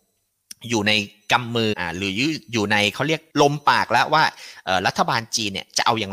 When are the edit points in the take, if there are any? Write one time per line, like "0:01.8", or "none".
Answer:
0:01.7
0:03.3